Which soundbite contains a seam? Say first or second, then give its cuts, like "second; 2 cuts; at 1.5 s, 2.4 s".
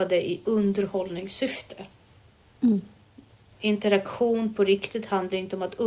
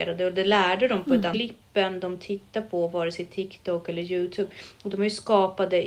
second; 1 cut; at 1.3 s